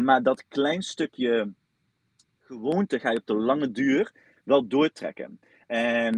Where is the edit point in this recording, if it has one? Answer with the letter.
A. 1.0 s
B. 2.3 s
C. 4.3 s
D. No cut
D